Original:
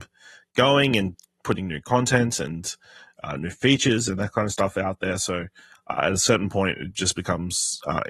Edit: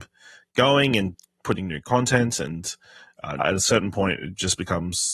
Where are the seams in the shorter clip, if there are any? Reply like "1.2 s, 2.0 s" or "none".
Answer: 3.4 s